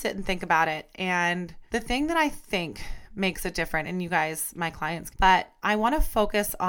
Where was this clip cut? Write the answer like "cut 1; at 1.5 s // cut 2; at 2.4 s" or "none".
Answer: cut 1; at 1.7 s // cut 2; at 5.1 s